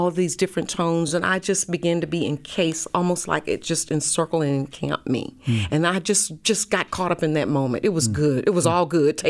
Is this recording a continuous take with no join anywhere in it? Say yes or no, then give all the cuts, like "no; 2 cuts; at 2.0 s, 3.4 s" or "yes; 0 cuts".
yes; 0 cuts